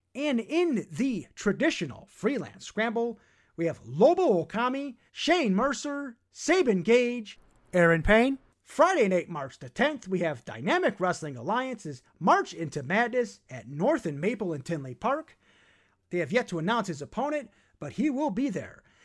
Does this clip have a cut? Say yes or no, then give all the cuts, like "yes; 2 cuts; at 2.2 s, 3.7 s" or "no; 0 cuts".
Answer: yes; 3 cuts; at 5.1 s, 8.5 s, 16.0 s